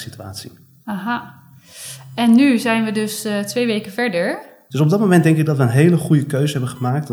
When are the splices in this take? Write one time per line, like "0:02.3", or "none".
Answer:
0:04.7